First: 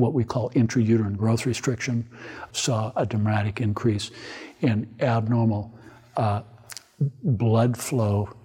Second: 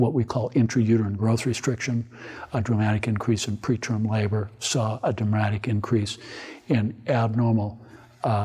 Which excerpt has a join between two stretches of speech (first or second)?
first